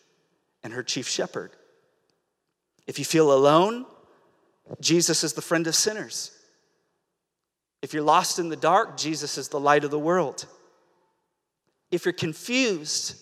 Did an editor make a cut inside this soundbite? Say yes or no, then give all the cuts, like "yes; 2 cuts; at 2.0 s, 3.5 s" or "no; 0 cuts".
no; 0 cuts